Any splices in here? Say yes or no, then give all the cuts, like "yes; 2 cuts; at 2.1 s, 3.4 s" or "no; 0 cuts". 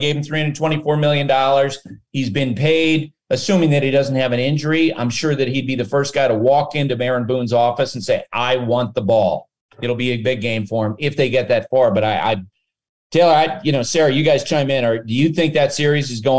no; 0 cuts